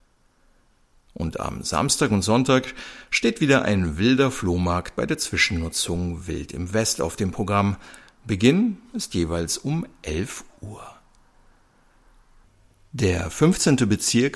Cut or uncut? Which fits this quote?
uncut